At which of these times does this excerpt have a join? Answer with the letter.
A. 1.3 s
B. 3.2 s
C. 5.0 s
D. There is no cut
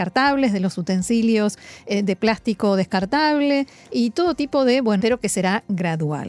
C